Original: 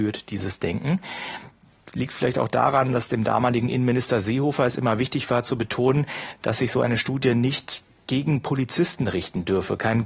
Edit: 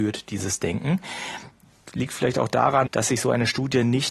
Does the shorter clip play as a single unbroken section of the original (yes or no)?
no